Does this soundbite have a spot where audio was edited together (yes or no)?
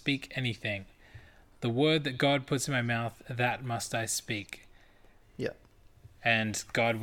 yes